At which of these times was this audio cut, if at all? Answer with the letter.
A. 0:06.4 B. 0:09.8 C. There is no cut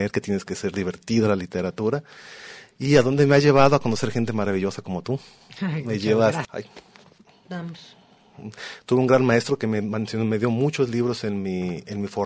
A